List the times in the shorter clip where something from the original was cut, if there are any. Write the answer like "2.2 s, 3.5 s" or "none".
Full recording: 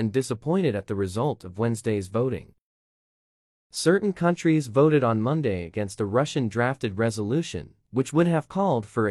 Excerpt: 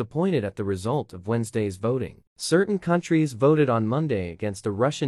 2.3 s